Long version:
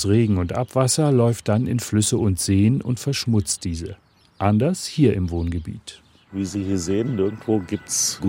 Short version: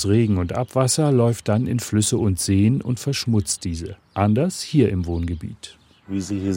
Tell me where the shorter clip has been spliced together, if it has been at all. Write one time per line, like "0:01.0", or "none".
0:04.1